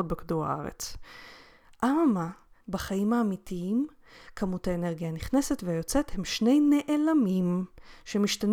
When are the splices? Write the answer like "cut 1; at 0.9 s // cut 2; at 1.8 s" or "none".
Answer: cut 1; at 2.6 s